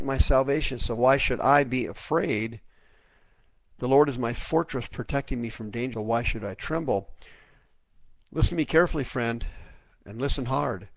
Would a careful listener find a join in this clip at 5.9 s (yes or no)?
yes